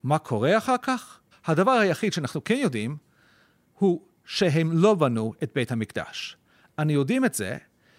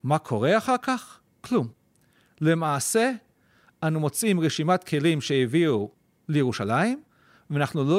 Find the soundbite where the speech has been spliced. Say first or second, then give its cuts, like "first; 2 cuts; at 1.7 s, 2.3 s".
first; 1 cut; at 1.3 s